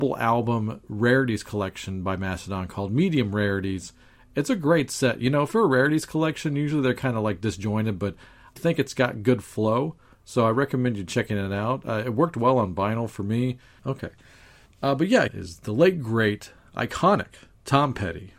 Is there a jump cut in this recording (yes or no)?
yes